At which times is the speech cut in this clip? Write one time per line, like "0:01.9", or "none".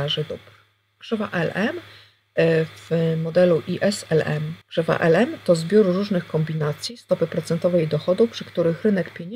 0:04.6